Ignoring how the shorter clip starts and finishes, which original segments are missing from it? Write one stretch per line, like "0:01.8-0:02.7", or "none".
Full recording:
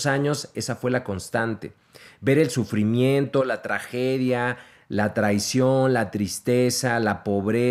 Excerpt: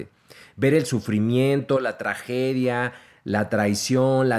none